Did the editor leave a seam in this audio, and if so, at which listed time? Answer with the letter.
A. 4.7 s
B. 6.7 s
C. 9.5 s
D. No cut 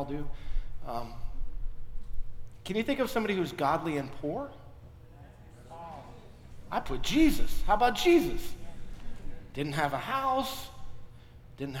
D